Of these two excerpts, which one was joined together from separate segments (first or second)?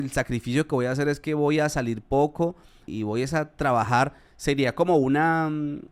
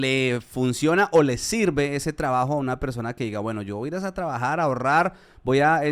first